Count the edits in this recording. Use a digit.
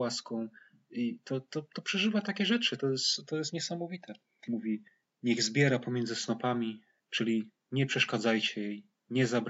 2